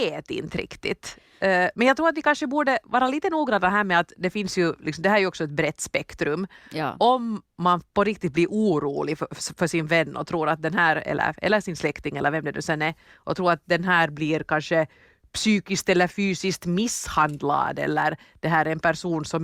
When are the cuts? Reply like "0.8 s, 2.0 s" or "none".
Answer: none